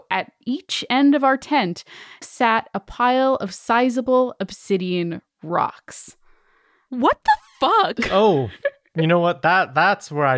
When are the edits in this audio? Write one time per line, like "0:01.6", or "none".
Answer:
0:02.2